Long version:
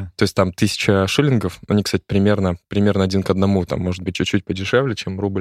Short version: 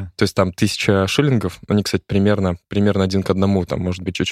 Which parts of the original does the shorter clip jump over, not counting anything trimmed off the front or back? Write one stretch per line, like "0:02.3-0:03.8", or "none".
none